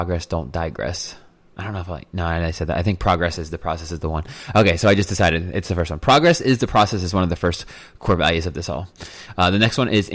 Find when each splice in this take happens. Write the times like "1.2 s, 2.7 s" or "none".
none